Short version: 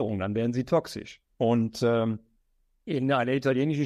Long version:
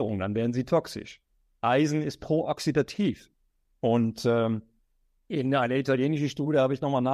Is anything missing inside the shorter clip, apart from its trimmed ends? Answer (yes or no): yes